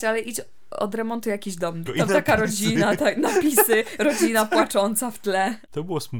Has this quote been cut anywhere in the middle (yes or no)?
yes